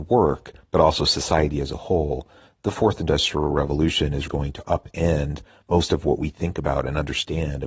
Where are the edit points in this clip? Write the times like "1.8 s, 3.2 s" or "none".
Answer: 4.3 s